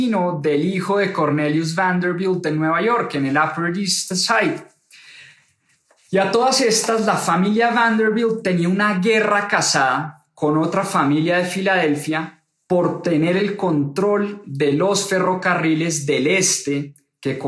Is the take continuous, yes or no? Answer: yes